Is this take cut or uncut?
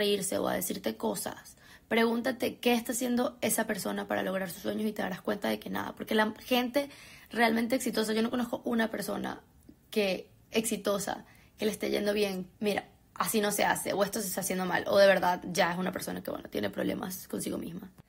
cut